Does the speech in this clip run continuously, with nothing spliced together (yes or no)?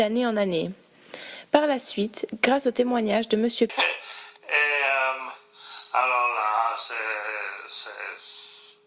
no